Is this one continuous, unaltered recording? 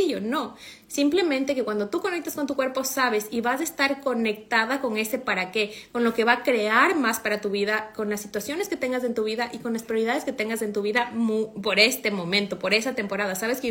yes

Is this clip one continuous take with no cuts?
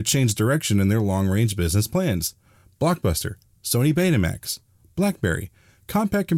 yes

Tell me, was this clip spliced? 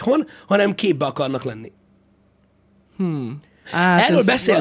yes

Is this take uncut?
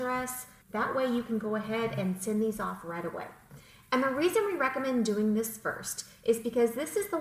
yes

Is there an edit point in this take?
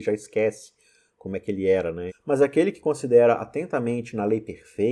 yes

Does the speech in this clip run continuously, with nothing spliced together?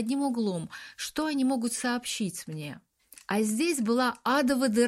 yes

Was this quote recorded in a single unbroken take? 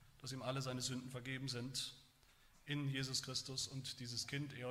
yes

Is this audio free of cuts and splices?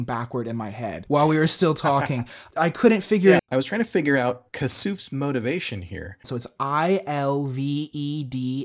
no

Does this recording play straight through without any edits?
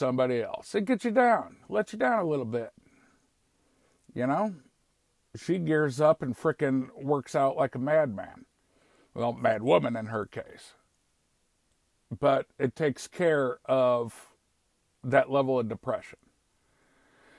yes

